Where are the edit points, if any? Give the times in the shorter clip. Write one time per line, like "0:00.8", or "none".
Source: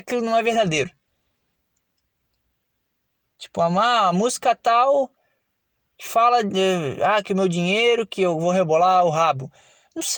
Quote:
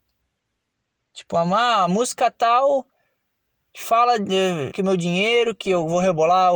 0:04.7